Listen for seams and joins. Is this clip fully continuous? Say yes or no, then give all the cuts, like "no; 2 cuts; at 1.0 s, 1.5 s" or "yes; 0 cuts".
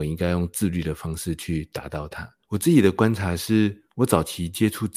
no; 1 cut; at 2.4 s